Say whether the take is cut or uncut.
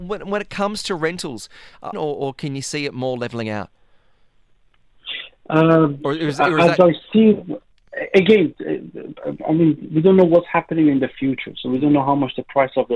cut